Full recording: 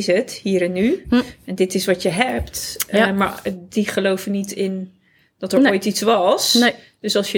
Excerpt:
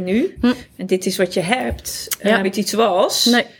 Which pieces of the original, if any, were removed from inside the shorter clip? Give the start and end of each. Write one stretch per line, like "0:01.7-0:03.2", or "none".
0:03.1-0:05.7